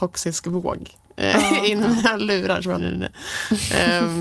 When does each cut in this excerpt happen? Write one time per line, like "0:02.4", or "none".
0:02.8